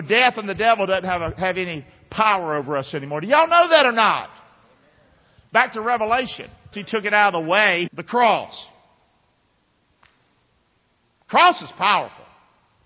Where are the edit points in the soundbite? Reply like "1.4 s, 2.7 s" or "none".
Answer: 6.7 s, 7.9 s